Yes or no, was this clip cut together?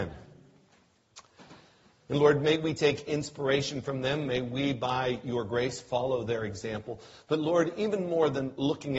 yes